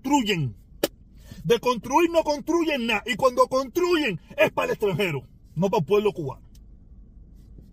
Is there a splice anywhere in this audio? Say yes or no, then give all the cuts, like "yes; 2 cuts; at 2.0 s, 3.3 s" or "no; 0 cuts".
no; 0 cuts